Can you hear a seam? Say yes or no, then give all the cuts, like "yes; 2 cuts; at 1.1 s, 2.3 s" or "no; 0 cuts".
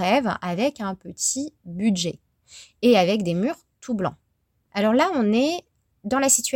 yes; 1 cut; at 4.7 s